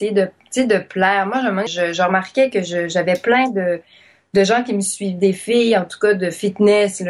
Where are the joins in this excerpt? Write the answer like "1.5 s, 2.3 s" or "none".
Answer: 1.7 s